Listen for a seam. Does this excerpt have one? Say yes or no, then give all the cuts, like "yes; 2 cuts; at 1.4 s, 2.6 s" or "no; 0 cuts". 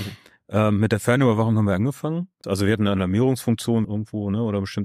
yes; 2 cuts; at 2.4 s, 3.8 s